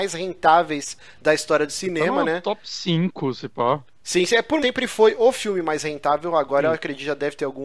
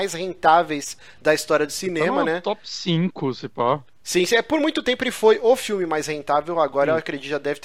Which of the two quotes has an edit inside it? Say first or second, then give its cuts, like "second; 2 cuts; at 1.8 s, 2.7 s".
first; 1 cut; at 4.6 s